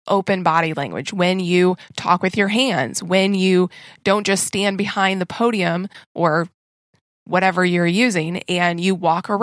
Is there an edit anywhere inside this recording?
no; 0 cuts

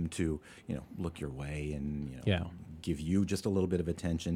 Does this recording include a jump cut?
no; 0 cuts

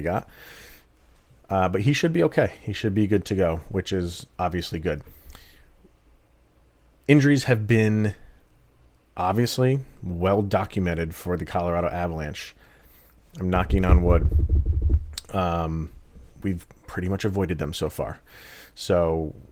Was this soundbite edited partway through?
no; 0 cuts

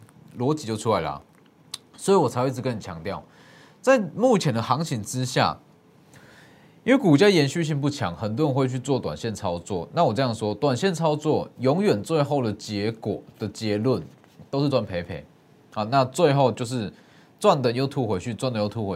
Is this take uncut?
no; 1 cut; at 14.7 s

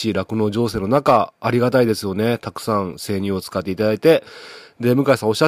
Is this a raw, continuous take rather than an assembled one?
yes; 0 cuts

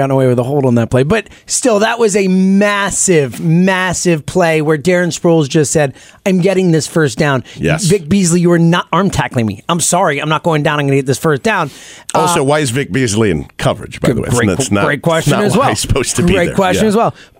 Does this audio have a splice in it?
no; 0 cuts

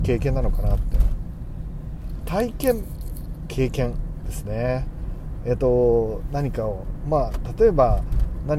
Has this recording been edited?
no; 0 cuts

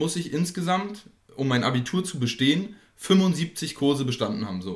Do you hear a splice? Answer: no; 0 cuts

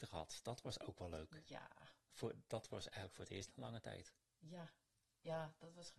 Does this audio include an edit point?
no; 0 cuts

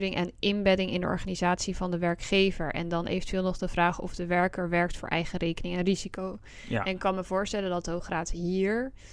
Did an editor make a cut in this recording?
no; 0 cuts

